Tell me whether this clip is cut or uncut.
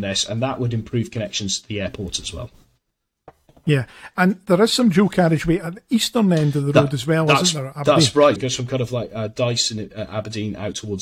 cut